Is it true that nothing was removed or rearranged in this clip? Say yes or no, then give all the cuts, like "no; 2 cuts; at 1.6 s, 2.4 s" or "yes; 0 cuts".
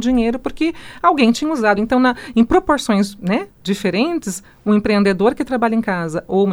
yes; 0 cuts